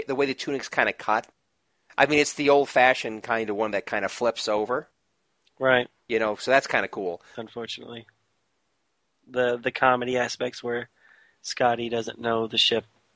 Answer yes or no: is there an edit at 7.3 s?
yes